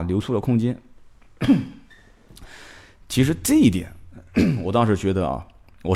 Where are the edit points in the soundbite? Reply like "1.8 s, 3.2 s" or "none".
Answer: none